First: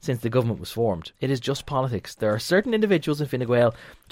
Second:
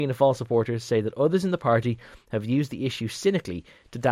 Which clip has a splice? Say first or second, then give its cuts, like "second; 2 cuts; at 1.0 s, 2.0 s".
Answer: first; 1 cut; at 1.1 s